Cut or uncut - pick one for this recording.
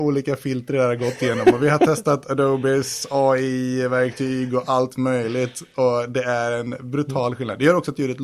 uncut